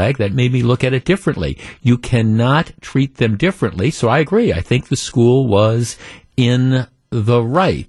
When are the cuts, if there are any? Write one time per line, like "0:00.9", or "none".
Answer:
none